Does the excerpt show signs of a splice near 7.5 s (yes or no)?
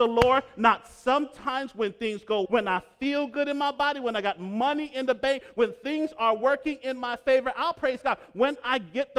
no